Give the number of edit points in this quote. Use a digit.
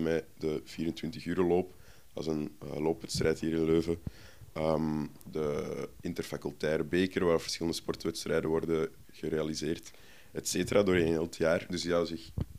0